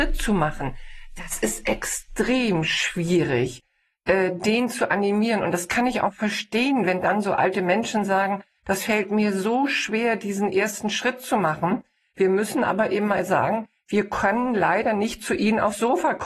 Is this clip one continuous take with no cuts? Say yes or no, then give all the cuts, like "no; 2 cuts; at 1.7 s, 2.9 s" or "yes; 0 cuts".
yes; 0 cuts